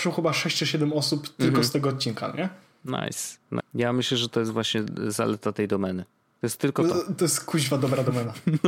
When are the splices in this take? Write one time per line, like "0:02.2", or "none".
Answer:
0:03.6